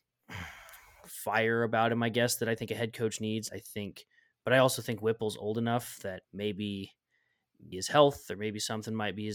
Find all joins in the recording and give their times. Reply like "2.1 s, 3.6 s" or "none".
3.5 s, 6.2 s, 7.7 s

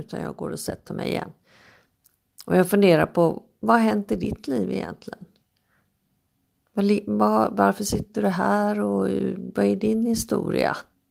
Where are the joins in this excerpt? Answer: none

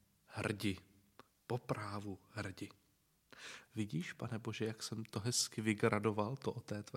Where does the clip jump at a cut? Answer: 3.7 s

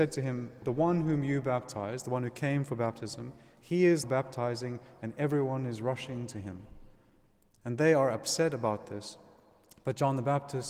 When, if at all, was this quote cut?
4.0 s

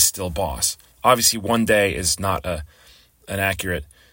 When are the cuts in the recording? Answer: none

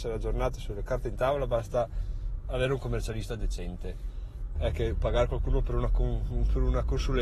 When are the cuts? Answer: 4.5 s

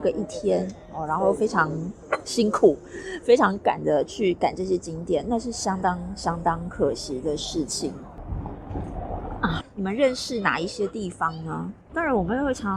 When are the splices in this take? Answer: 9.6 s

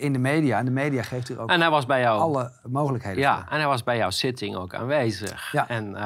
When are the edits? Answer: 2.6 s

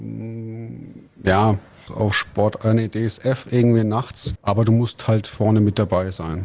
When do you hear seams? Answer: 1.9 s, 4.4 s

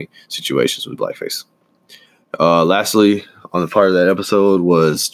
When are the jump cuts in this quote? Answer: none

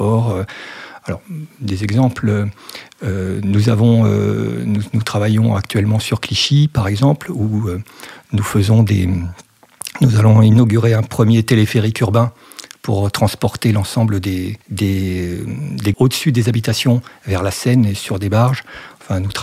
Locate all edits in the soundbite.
14.6 s, 15.9 s

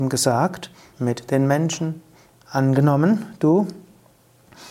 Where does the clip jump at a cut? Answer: 0.9 s, 2.3 s

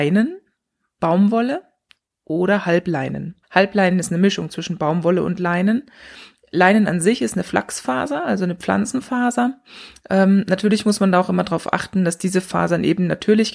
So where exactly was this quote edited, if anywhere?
3.4 s

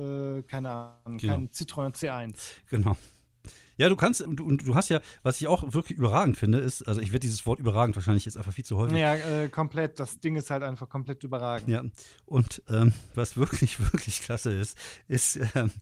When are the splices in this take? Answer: 4.3 s

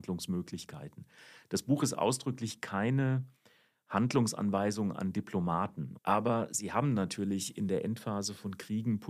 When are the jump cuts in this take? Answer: 6.0 s

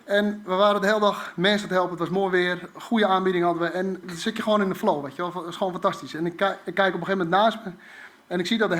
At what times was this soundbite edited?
4.0 s

